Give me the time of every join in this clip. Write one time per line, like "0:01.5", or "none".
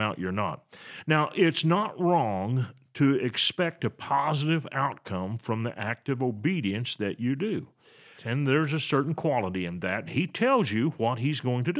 0:08.2
0:10.1